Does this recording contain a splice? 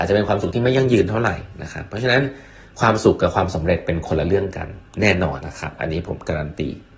yes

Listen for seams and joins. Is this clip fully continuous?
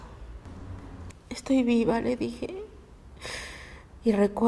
no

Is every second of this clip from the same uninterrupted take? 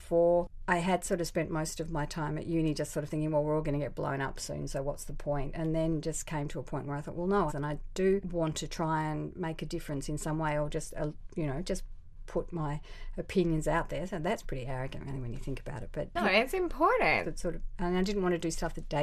no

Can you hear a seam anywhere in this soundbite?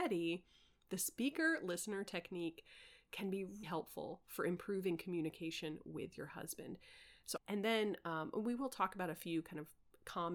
yes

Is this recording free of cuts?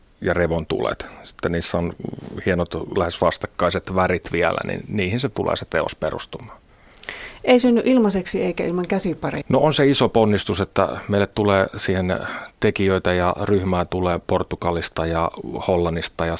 no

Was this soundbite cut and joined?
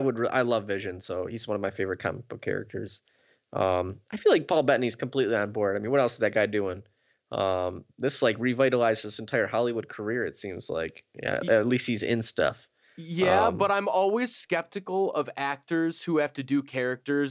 no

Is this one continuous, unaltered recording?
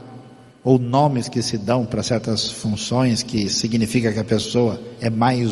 yes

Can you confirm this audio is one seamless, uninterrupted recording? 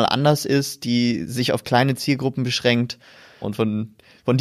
no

